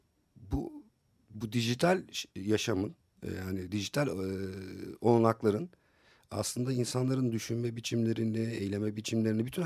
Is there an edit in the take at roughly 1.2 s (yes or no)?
no